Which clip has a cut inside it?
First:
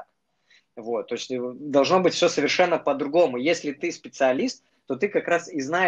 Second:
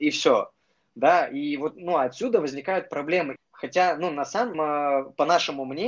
second; 2 cuts; at 3.4 s, 4.5 s

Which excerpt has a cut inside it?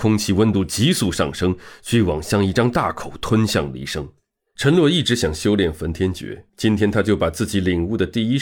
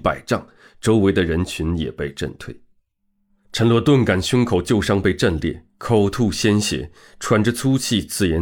first; 2 cuts; at 4.6 s, 6.5 s

